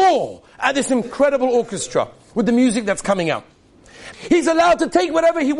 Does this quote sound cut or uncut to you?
cut